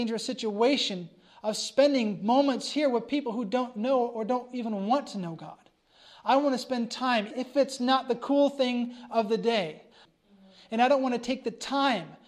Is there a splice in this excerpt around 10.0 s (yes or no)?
yes